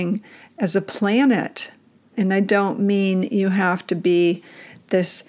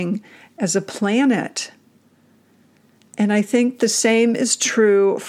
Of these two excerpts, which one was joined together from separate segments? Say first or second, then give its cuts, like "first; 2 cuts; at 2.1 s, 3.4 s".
first; 1 cut; at 2.1 s